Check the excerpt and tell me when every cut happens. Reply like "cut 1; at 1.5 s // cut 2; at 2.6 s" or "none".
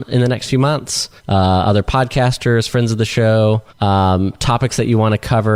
cut 1; at 1.2 s // cut 2; at 3.7 s